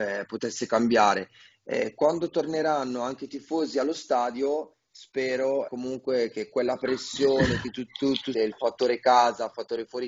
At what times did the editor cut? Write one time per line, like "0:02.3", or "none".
0:01.6
0:05.7
0:08.3